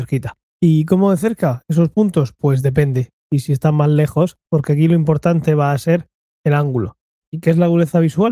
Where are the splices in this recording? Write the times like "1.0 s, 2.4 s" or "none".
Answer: 3.3 s, 4.4 s, 7.2 s